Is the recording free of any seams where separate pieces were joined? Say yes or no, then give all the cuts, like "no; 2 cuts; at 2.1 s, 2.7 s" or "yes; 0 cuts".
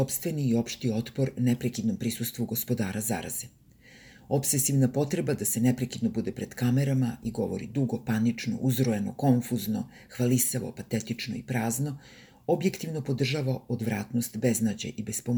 yes; 0 cuts